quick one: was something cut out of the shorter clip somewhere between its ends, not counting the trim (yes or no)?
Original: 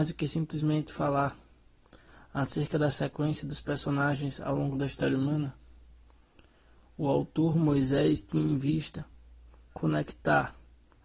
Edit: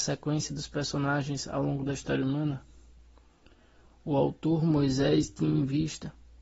no